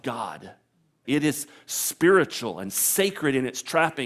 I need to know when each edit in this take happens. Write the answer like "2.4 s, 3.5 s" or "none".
1.0 s